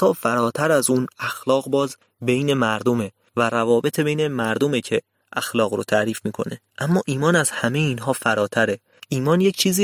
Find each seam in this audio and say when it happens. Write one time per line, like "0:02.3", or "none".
0:01.1
0:06.7